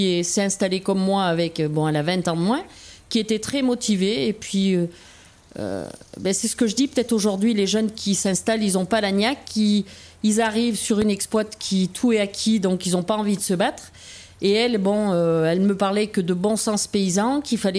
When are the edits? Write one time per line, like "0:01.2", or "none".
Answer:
none